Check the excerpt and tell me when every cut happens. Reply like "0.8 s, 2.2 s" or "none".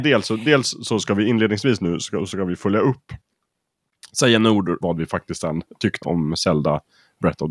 4.8 s, 6.0 s